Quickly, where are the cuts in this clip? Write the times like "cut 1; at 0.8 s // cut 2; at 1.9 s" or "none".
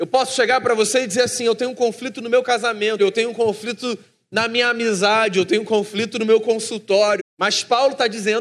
cut 1; at 3.0 s // cut 2; at 7.2 s